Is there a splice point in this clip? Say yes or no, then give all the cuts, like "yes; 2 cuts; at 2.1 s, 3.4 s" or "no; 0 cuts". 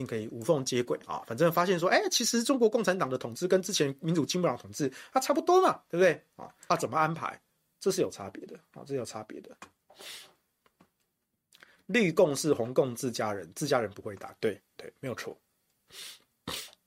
yes; 1 cut; at 6.7 s